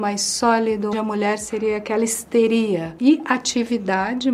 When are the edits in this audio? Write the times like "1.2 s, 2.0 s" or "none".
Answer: 0.9 s